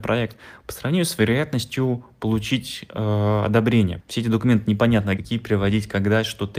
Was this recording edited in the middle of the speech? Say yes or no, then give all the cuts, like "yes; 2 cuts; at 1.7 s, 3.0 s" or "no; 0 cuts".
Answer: yes; 2 cuts; at 4.0 s, 5.2 s